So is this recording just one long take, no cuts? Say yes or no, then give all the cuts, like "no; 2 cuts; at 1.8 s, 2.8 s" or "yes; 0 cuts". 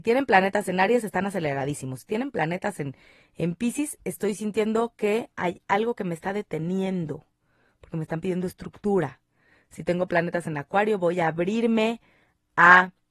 yes; 0 cuts